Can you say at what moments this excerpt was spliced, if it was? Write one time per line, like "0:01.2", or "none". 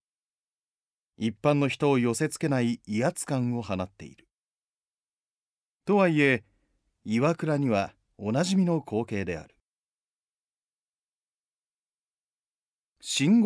none